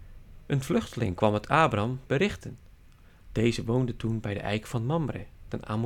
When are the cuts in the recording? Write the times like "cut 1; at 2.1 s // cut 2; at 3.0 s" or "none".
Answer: cut 1; at 2.1 s